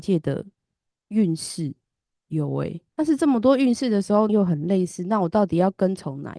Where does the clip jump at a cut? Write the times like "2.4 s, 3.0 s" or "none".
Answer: 2.9 s, 4.3 s